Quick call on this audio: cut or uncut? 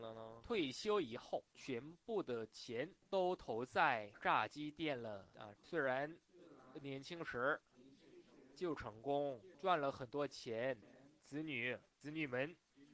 cut